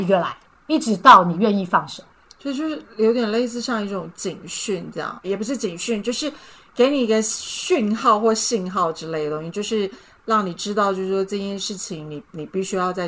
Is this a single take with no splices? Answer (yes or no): no